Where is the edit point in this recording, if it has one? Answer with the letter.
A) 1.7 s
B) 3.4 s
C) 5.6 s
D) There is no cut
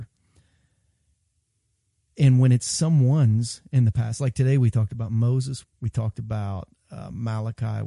C